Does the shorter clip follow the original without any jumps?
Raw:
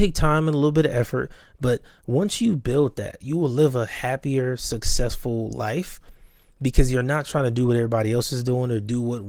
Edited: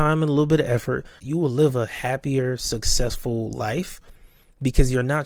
no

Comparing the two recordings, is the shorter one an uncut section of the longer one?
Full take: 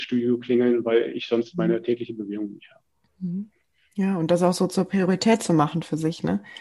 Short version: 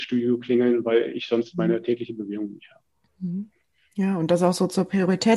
yes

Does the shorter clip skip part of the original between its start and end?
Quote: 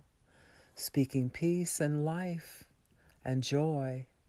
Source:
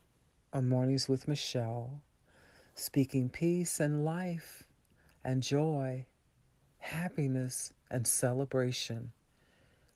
no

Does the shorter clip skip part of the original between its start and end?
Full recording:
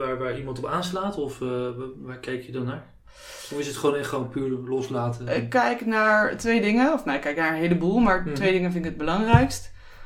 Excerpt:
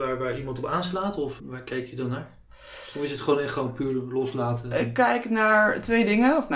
yes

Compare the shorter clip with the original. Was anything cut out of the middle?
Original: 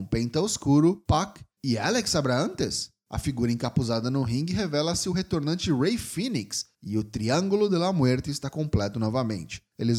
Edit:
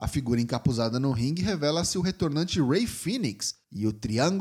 no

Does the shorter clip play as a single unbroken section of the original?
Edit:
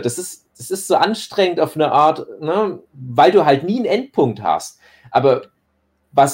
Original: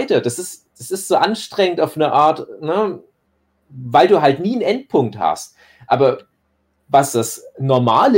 no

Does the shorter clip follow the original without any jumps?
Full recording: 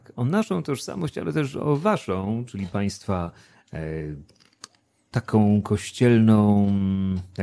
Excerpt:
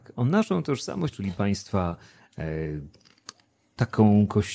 no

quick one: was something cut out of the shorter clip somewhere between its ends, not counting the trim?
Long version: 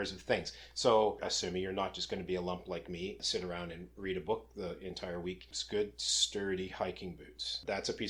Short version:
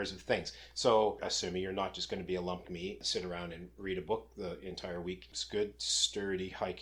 yes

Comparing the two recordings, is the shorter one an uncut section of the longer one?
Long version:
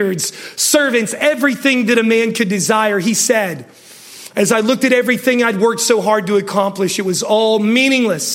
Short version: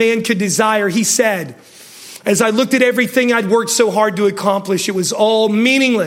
yes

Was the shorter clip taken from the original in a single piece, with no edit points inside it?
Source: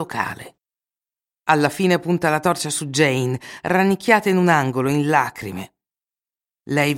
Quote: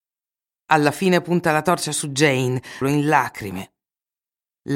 no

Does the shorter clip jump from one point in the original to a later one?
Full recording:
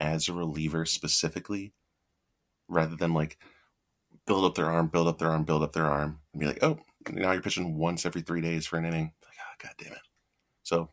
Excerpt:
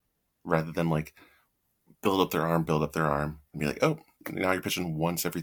yes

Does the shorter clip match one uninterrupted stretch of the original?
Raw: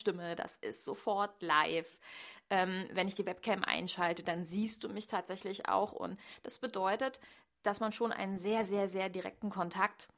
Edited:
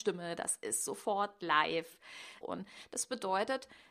no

